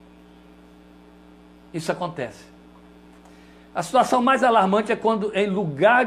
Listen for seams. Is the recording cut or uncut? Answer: uncut